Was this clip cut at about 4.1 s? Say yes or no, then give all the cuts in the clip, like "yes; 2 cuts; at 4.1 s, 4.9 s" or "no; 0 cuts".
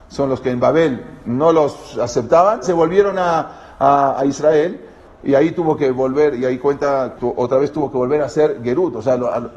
no; 2 cuts; at 2.6 s, 7.2 s